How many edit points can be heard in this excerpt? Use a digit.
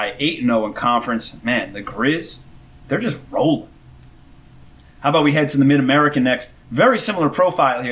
0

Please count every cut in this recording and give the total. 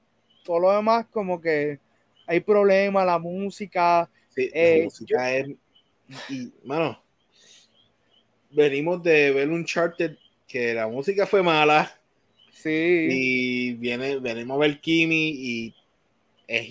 0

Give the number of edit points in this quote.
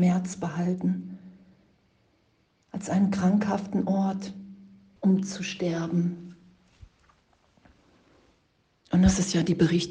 1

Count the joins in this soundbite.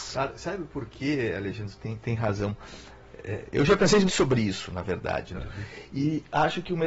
2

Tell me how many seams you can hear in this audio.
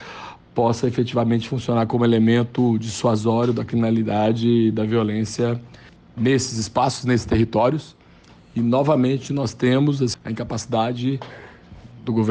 1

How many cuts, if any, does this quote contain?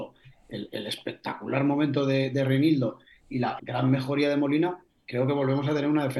1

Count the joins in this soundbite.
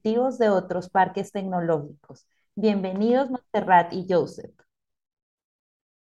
0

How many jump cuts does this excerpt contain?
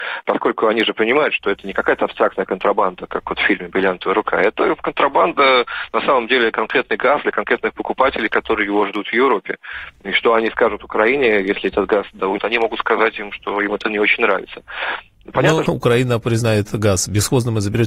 2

